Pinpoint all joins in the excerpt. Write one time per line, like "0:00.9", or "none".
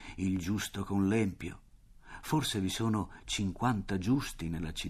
none